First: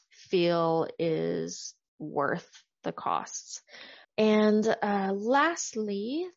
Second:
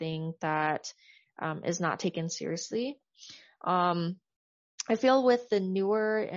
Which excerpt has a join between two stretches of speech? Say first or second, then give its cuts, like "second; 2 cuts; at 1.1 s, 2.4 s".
first; 1 cut; at 4.0 s